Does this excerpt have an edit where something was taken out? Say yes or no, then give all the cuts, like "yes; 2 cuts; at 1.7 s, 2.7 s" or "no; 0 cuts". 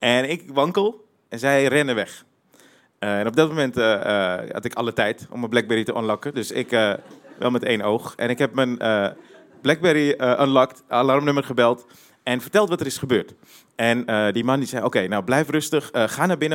no; 0 cuts